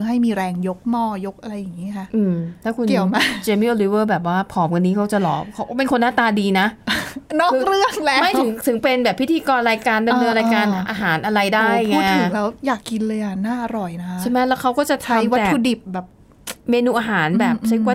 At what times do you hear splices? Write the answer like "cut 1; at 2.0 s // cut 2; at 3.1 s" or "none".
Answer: cut 1; at 12.8 s

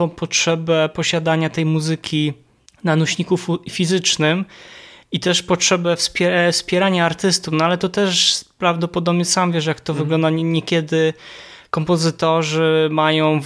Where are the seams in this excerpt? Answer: none

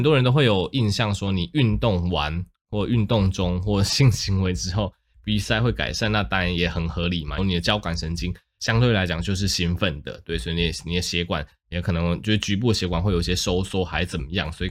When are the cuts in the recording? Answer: cut 1; at 7.4 s

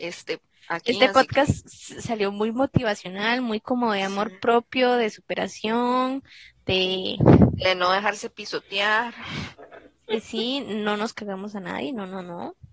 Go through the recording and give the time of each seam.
none

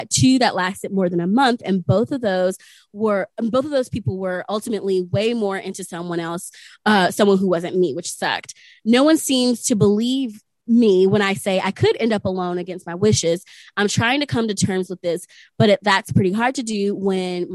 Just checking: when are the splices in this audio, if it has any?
none

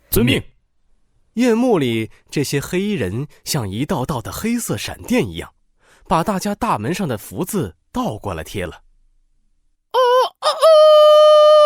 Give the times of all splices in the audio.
none

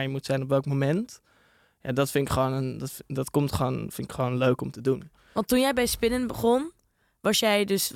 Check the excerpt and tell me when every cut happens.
none

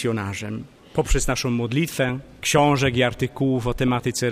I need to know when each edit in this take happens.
cut 1; at 2.4 s

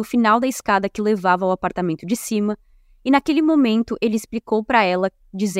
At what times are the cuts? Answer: none

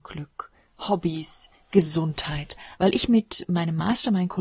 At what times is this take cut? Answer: cut 1; at 2.8 s

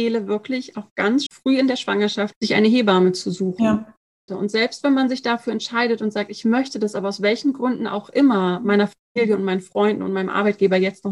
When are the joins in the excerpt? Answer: cut 1; at 1.3 s // cut 2; at 2.3 s // cut 3; at 4.3 s

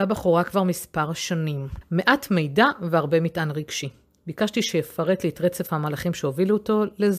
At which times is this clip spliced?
cut 1; at 1.8 s

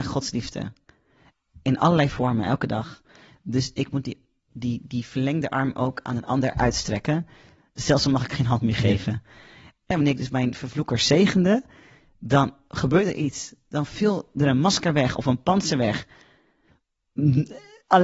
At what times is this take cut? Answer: cut 1; at 9.9 s

